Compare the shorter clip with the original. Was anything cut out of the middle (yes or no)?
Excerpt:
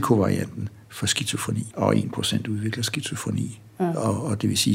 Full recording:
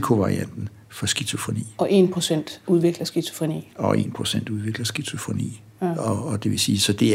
yes